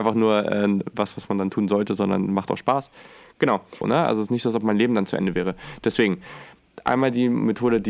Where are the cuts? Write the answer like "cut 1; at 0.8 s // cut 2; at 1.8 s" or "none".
cut 1; at 3.8 s